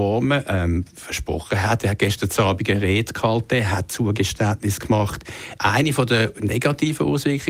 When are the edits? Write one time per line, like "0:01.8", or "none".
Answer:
0:05.6